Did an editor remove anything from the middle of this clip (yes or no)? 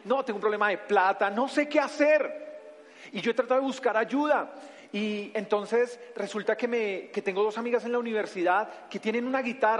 no